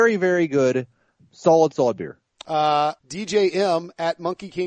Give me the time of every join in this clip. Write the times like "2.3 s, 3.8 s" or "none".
1.2 s, 3.0 s